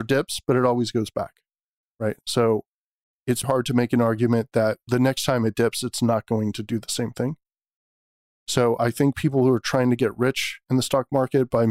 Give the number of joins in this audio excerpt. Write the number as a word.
one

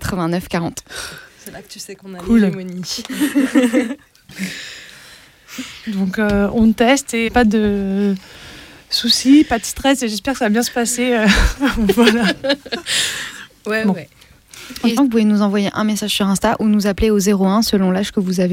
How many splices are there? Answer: three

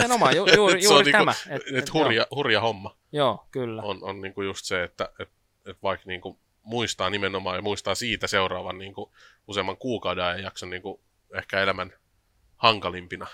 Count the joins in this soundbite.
zero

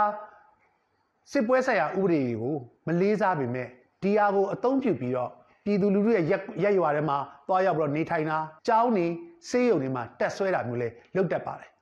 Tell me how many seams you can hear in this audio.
one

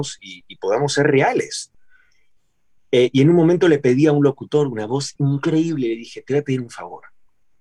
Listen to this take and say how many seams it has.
zero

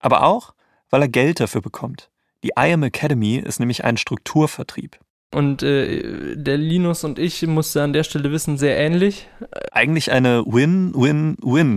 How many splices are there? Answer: three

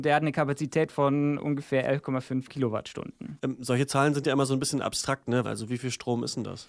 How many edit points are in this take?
one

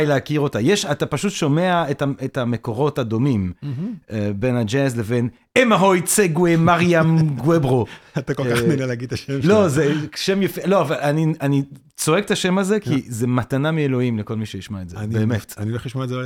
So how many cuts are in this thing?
zero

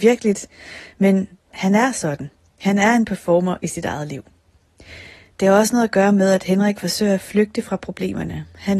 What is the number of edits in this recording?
zero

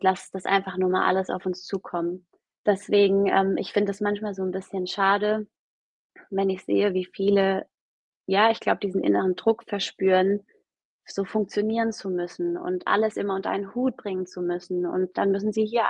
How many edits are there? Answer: one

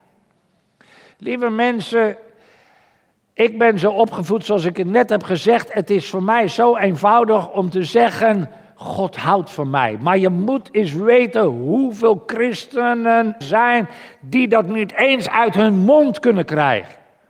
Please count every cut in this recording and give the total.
one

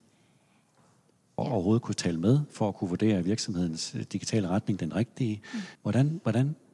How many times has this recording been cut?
two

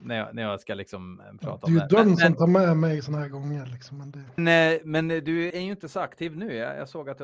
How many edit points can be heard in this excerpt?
two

